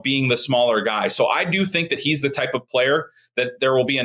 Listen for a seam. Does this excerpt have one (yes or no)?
no